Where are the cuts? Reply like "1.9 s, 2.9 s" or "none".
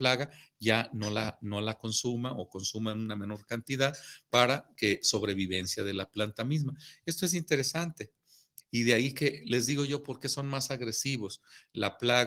8.6 s